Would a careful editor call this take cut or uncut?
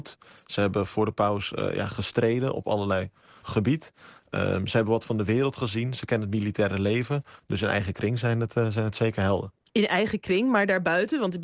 cut